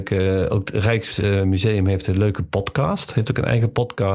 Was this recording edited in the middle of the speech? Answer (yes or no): no